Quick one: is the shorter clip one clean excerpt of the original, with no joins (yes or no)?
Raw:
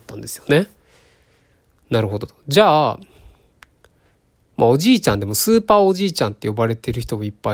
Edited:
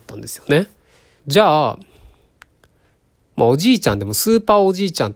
no